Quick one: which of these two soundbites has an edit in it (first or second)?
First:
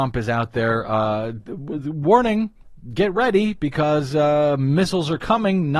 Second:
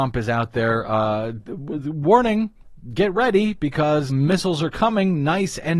second